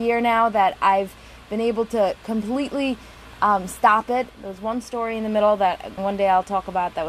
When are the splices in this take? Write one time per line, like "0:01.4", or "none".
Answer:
0:04.3
0:06.0